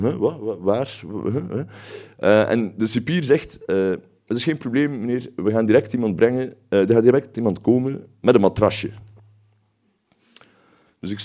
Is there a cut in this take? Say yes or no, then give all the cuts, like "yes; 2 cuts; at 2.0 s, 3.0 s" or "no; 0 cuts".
no; 0 cuts